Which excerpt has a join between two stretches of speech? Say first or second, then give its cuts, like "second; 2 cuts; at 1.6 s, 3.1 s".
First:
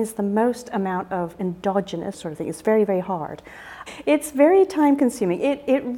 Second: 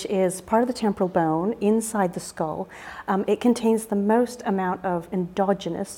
first; 2 cuts; at 2.1 s, 3.9 s